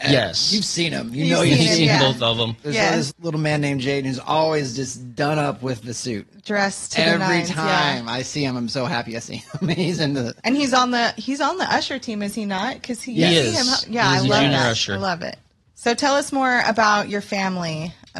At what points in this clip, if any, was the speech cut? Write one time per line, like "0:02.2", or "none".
0:03.1
0:15.6